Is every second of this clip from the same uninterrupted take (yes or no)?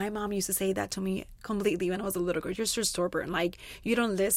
no